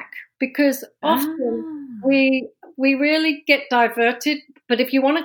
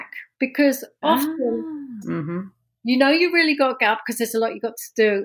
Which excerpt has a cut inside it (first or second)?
second